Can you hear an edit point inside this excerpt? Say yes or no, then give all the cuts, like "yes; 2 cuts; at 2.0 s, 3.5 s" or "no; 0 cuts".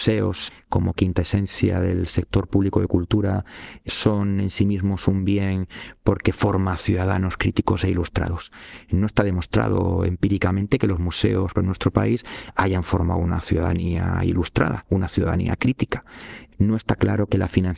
yes; 1 cut; at 11.5 s